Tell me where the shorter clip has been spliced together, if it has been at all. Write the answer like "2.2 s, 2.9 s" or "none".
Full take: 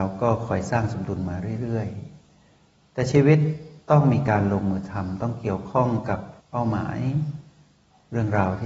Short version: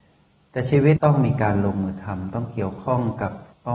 1.0 s